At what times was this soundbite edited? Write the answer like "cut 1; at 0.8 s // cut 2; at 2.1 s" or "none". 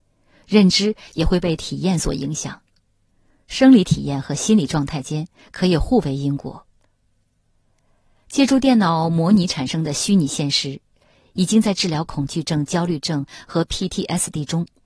none